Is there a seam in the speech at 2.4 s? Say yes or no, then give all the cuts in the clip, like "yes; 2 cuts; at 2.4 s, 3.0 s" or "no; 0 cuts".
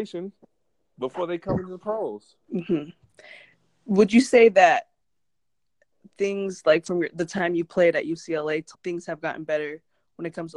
yes; 2 cuts; at 2.4 s, 8.7 s